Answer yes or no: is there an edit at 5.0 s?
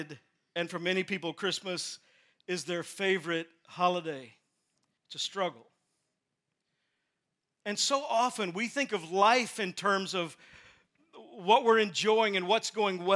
yes